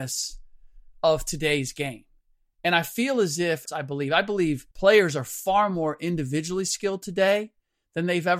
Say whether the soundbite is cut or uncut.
cut